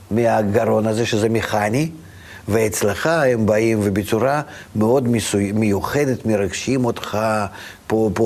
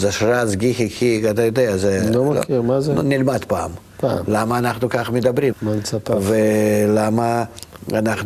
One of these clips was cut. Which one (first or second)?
second